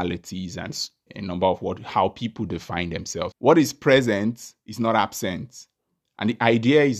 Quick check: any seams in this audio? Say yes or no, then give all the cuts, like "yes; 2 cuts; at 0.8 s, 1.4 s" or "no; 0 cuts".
yes; 2 cuts; at 1.1 s, 3.3 s